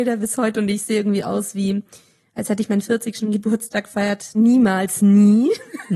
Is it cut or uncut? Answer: cut